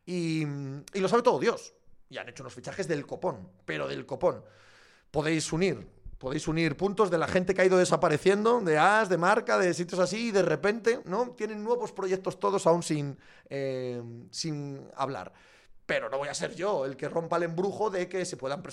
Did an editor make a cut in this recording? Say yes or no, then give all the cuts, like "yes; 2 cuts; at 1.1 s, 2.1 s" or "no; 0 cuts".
no; 0 cuts